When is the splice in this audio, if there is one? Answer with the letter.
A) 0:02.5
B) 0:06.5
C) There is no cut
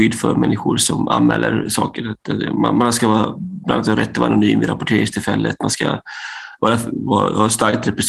C